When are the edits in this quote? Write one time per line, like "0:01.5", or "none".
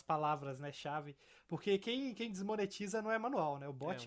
none